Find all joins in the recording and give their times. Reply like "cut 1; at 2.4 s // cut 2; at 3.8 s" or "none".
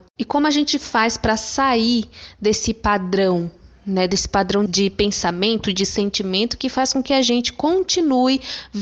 cut 1; at 4.7 s